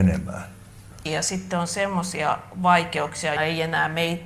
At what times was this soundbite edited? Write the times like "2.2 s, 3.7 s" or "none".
1.1 s, 3.4 s